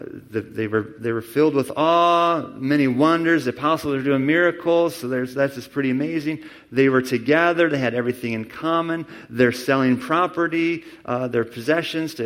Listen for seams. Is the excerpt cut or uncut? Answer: uncut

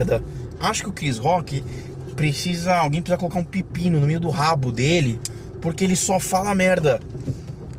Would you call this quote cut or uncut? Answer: uncut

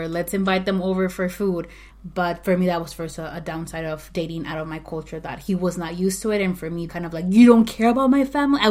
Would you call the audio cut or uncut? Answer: cut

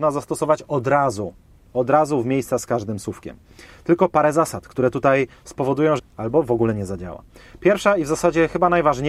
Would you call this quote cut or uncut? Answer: cut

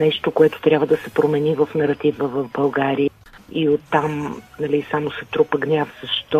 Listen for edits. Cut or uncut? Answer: cut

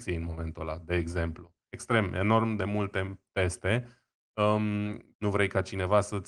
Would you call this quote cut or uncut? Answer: cut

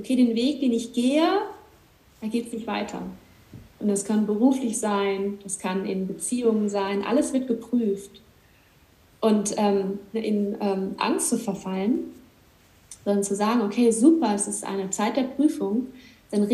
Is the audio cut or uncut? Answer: cut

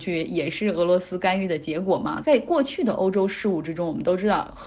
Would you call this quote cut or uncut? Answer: cut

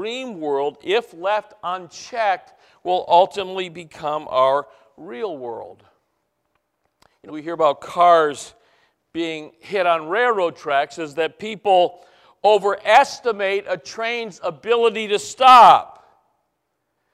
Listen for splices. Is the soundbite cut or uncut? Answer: cut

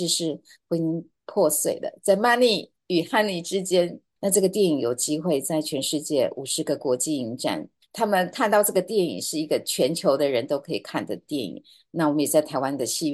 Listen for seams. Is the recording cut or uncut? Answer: cut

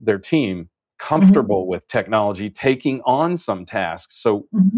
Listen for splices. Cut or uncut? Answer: uncut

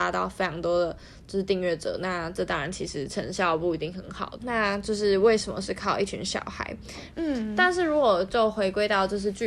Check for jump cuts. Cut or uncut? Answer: cut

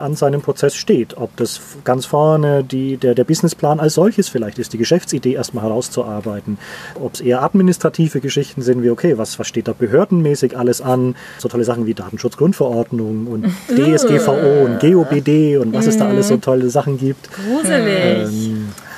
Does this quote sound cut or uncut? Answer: cut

